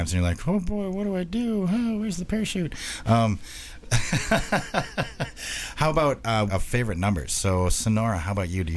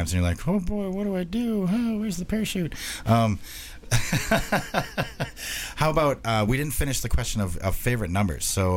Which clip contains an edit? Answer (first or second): first